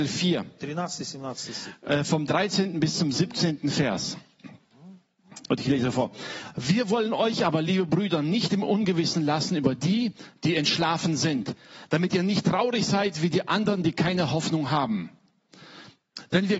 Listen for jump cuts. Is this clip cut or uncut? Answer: uncut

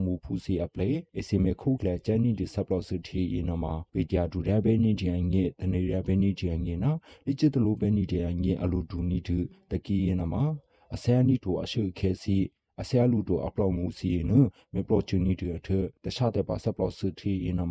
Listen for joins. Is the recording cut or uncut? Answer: cut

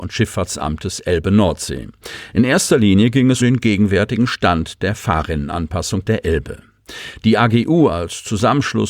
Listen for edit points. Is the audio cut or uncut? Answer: cut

